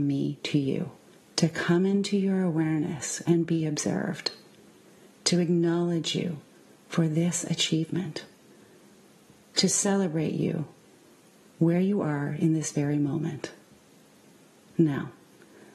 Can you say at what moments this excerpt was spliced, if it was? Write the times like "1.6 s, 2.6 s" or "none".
1.2 s